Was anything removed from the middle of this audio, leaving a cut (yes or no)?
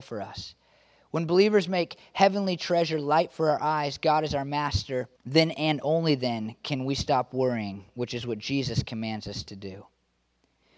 no